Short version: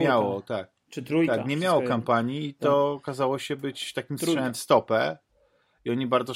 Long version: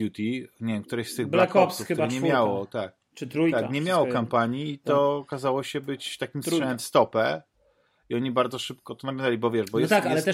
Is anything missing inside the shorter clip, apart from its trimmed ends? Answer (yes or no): no